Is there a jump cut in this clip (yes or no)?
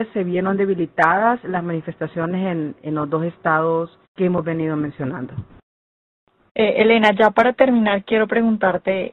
yes